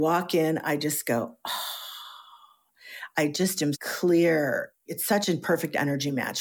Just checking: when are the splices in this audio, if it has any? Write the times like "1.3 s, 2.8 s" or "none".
3.7 s